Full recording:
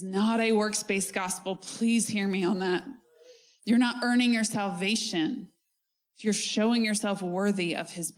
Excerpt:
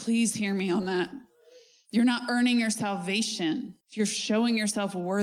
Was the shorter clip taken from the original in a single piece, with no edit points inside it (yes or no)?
no